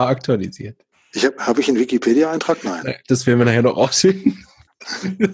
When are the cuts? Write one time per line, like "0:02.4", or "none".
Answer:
none